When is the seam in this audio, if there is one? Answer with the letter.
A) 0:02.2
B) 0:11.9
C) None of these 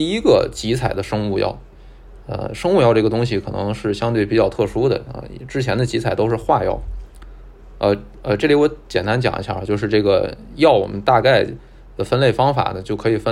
C